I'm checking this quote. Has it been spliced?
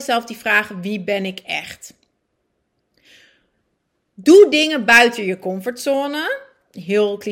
no; 0 cuts

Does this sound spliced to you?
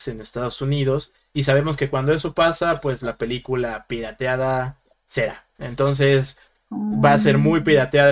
no; 0 cuts

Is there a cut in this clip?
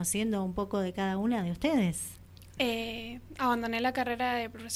yes; 1 cut; at 2.6 s

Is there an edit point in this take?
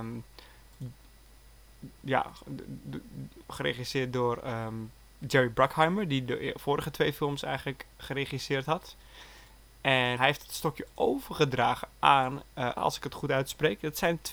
yes; 2 cuts; at 10.2 s, 12.8 s

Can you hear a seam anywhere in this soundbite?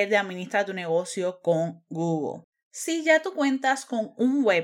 no; 0 cuts

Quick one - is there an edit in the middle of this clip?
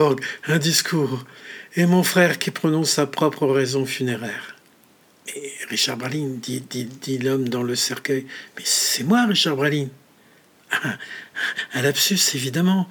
yes; 1 cut; at 5.2 s

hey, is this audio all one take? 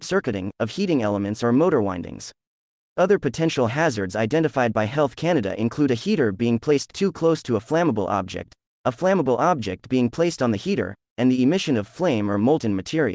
yes; 0 cuts

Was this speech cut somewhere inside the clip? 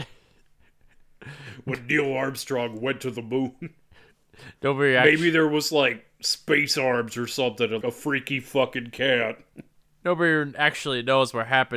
yes; 1 cut; at 7.8 s

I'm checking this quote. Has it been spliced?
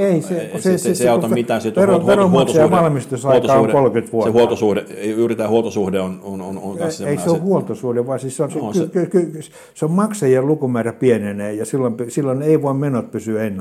no; 0 cuts

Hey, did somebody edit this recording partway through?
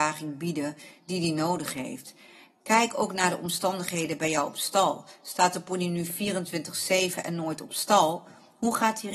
no; 0 cuts

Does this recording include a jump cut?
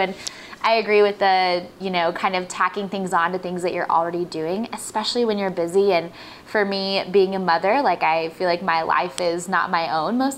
no; 0 cuts

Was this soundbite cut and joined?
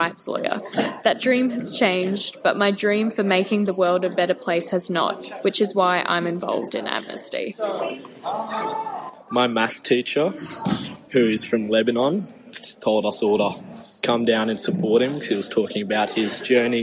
yes; 1 cut; at 9.3 s

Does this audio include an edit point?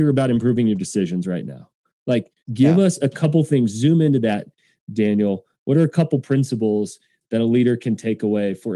yes; 1 cut; at 2.4 s

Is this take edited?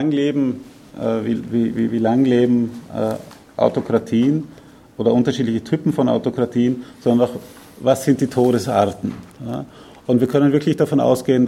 no; 0 cuts

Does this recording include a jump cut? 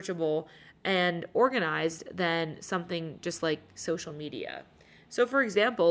no; 0 cuts

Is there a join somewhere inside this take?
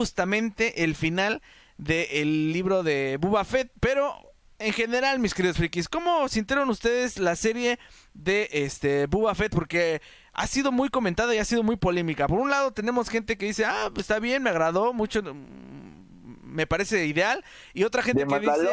no; 0 cuts

